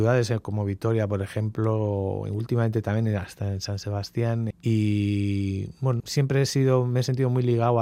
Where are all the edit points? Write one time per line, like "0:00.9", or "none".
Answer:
0:04.5
0:06.0

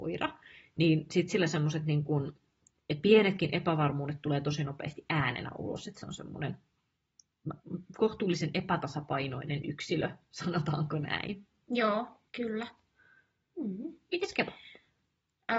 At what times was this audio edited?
0:12.3

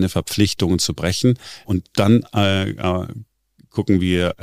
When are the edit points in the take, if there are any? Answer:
0:01.6

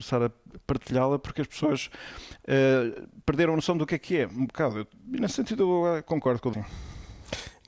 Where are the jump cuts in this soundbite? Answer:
0:06.5

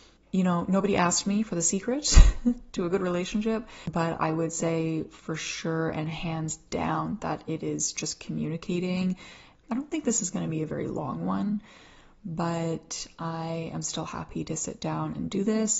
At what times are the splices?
0:09.6

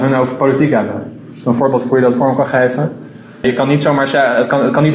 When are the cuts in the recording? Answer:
0:03.4

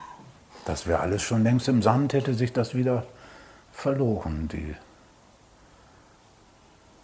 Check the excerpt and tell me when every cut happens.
none

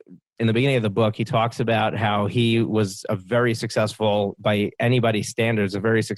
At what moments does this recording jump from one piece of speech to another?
none

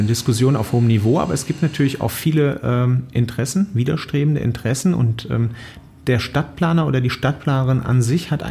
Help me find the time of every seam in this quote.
none

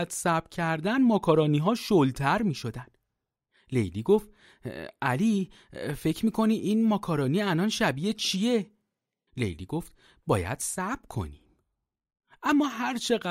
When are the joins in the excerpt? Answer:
0:09.3

